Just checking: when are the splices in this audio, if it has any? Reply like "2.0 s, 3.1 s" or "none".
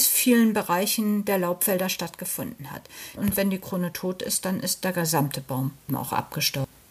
3.2 s, 5.9 s